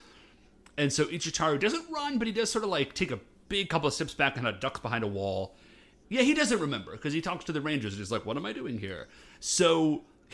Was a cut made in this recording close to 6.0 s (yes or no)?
yes